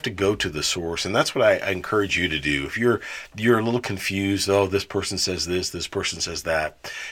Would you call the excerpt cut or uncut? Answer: uncut